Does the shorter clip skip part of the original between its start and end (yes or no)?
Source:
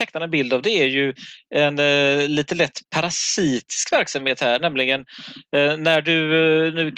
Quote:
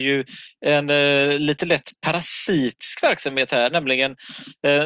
no